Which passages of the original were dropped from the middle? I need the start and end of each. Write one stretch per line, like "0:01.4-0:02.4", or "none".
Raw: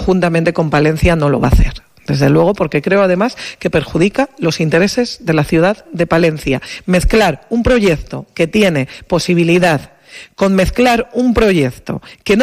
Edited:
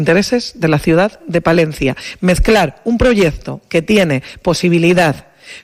none